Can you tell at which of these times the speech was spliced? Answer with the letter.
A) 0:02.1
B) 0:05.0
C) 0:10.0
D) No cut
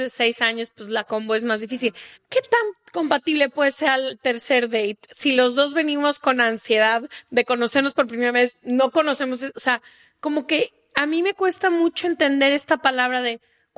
A